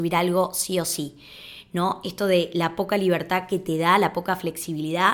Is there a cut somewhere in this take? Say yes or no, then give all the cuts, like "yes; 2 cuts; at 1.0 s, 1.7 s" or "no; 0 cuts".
no; 0 cuts